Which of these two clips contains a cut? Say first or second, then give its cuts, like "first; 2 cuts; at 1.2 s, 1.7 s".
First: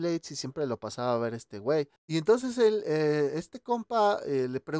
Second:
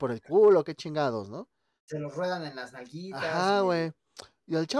first; 1 cut; at 2.0 s